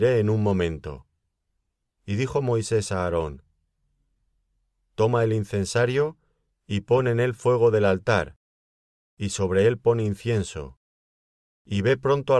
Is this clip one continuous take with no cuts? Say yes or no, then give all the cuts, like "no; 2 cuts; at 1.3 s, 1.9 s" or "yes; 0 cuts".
no; 1 cut; at 2.0 s